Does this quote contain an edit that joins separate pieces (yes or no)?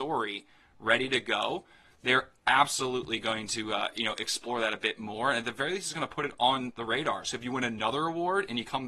no